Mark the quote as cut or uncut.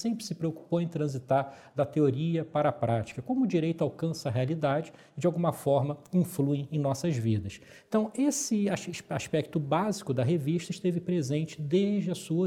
uncut